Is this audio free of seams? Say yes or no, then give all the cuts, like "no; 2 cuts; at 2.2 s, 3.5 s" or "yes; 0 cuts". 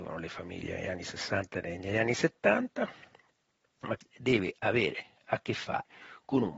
yes; 0 cuts